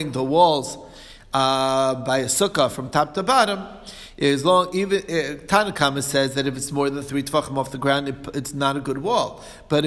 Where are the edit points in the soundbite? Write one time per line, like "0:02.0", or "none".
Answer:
none